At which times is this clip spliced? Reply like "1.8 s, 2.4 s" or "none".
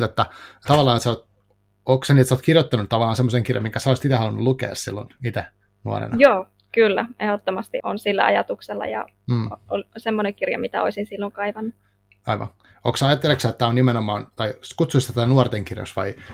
7.8 s